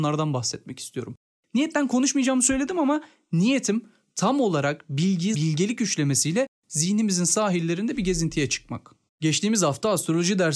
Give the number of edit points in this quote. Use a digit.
2